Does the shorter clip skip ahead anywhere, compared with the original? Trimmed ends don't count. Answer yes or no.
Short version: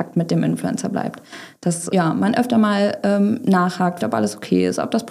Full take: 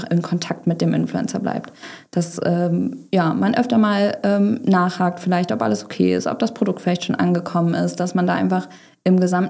yes